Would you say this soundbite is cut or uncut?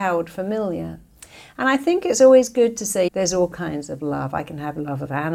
cut